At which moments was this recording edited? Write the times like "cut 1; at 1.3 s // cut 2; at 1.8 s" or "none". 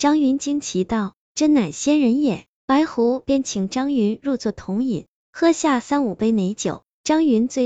cut 1; at 5.2 s